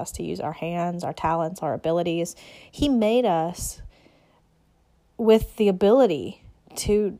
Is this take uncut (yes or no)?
yes